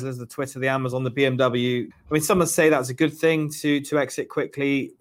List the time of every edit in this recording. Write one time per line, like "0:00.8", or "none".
0:01.9

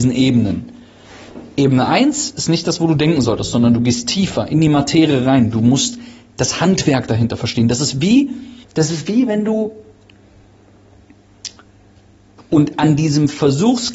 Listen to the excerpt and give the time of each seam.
0:08.6
0:12.4

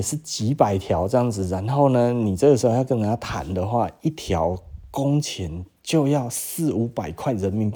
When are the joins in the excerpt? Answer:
none

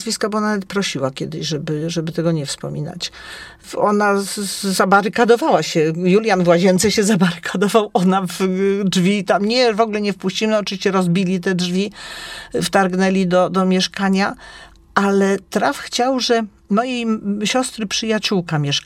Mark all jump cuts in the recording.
0:08.3

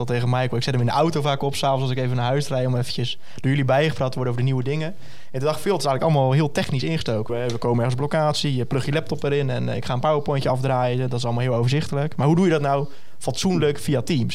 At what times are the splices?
0:07.3

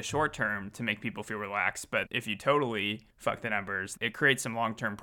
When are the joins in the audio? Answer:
0:02.1
0:04.0

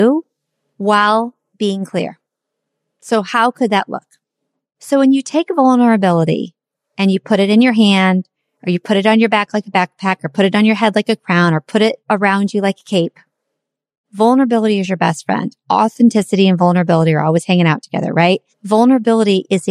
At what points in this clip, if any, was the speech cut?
0:18.5

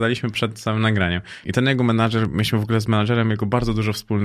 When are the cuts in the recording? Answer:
0:01.4

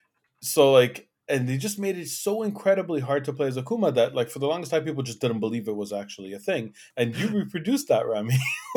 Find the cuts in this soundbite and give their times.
0:06.9

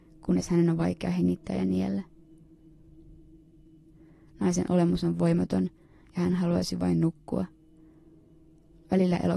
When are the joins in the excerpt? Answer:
none

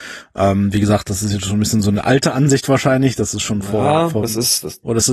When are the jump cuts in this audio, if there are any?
none

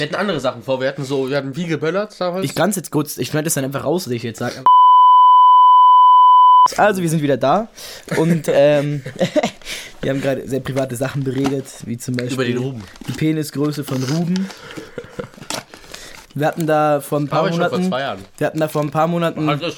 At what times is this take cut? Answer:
0:16.2

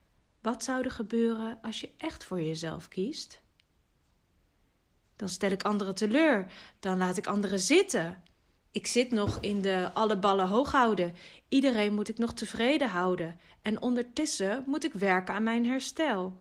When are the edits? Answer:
0:08.6

